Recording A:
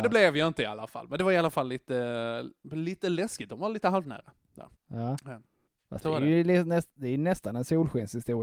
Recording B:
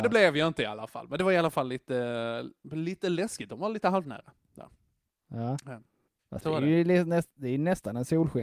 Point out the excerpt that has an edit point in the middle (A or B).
A